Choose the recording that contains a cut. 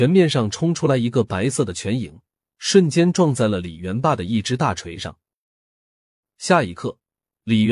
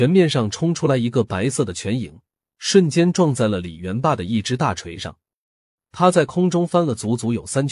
second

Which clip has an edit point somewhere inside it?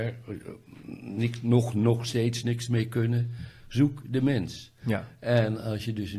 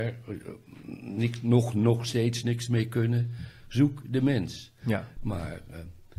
second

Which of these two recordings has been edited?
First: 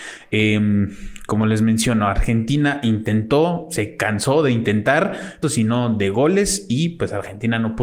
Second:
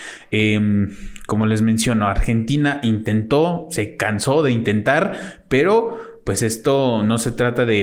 first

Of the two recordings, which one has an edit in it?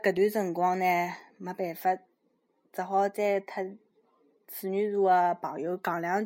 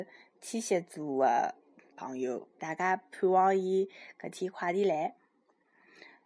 second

